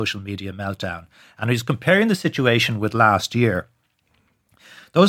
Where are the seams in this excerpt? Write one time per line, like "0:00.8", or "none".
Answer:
none